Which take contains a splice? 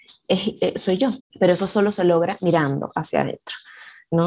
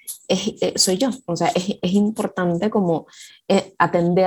first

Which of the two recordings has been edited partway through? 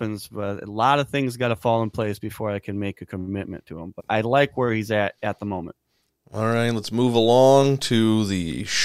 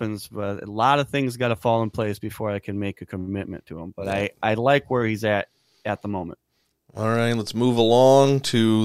first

